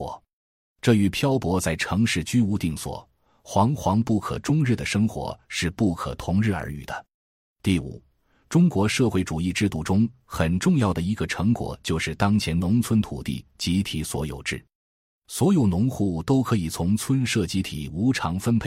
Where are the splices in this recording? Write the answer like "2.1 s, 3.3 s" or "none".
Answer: none